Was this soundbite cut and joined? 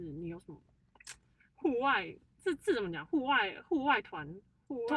no; 0 cuts

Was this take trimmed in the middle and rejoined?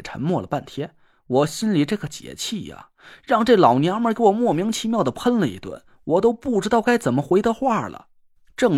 no; 0 cuts

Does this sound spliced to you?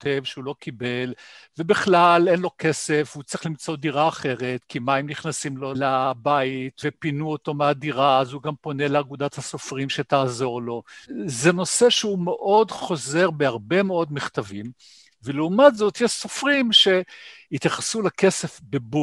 no; 0 cuts

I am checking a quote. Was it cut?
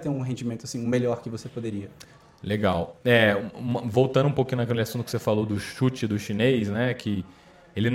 no; 0 cuts

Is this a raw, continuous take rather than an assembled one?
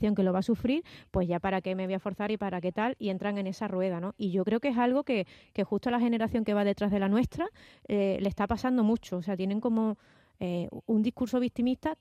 yes; 0 cuts

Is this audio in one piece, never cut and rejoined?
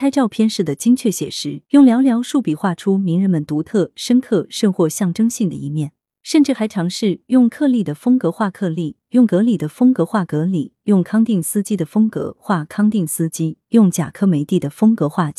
no; 1 cut; at 1.6 s

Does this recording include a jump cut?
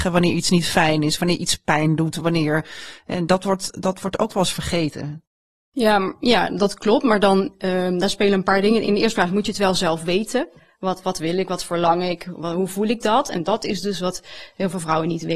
no; 0 cuts

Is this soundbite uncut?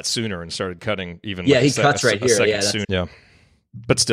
no; 1 cut; at 2.8 s

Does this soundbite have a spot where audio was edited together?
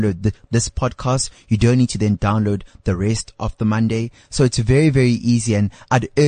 no; 0 cuts

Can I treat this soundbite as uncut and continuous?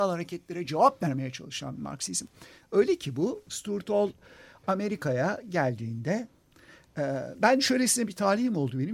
no; 1 cut; at 7.3 s

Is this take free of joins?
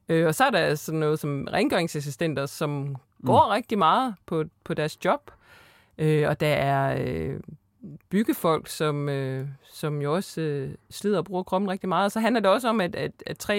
yes; 0 cuts

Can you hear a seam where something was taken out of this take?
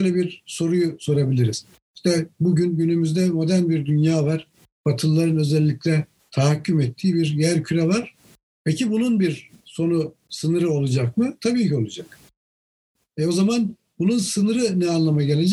no; 0 cuts

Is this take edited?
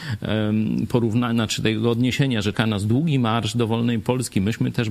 yes; 1 cut; at 2.5 s

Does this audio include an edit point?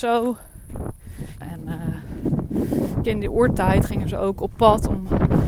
yes; 2 cuts; at 1.4 s, 3.0 s

